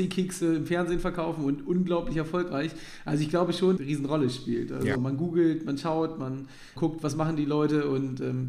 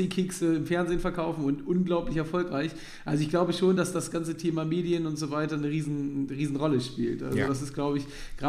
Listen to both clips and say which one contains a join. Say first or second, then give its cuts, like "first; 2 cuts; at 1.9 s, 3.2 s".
first; 3 cuts; at 3.8 s, 5.0 s, 6.8 s